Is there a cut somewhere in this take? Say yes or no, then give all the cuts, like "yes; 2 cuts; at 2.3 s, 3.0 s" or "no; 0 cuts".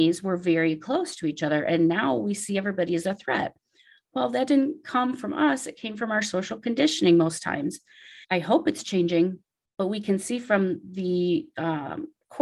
yes; 1 cut; at 8.2 s